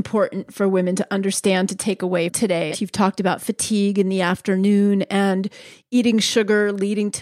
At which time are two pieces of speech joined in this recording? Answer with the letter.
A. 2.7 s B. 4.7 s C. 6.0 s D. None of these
A